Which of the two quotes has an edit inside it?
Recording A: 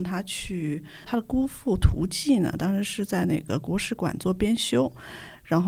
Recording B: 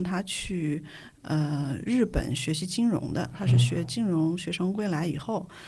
A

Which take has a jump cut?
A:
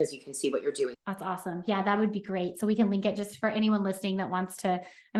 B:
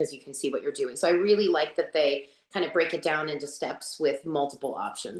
A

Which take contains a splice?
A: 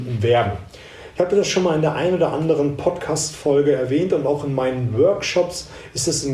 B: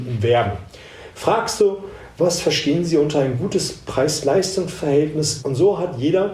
B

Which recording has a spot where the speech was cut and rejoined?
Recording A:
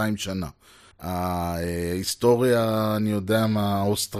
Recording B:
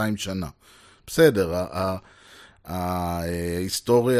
A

